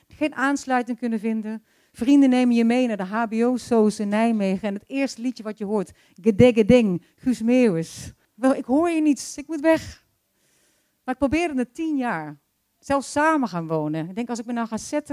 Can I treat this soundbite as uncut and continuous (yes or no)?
no